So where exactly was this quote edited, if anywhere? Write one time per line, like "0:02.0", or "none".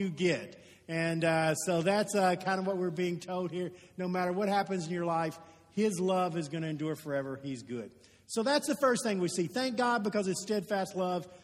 none